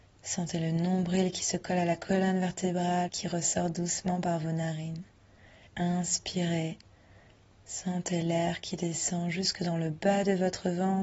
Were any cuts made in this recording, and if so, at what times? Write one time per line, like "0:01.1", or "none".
0:03.1
0:05.7